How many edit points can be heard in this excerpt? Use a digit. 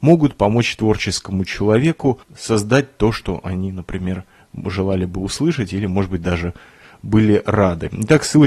1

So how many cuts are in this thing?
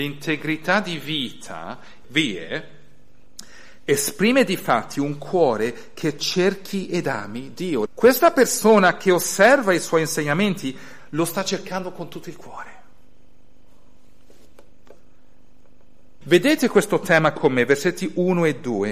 3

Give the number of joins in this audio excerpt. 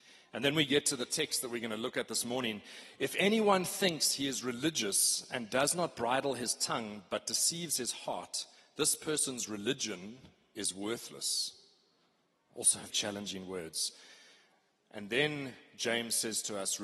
1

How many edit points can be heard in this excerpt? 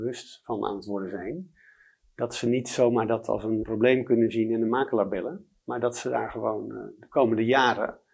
1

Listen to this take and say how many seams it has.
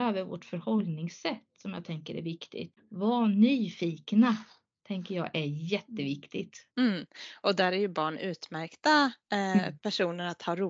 2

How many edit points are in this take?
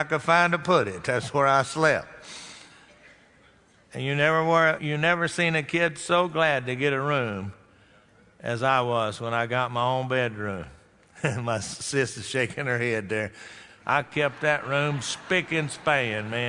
2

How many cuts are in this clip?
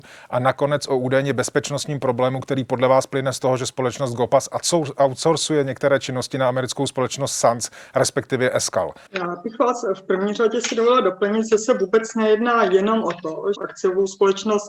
2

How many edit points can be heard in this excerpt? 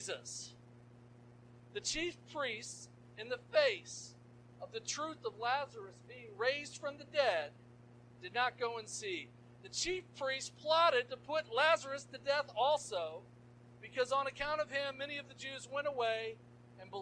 1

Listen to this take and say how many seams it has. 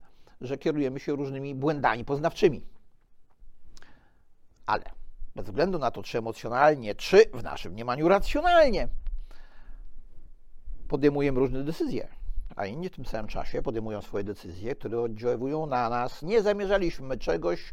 2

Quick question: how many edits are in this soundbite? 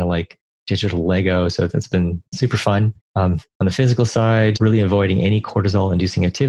2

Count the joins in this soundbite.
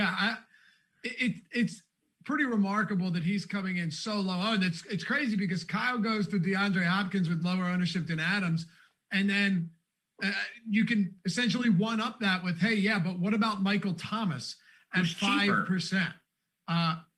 0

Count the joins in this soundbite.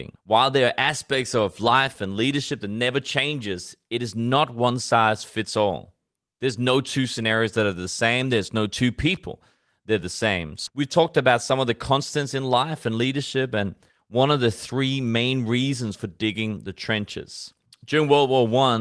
2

